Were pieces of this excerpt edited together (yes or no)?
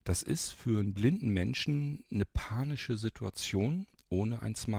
no